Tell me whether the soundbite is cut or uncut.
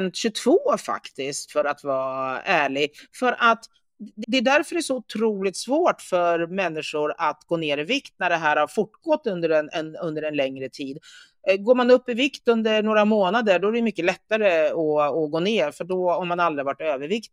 cut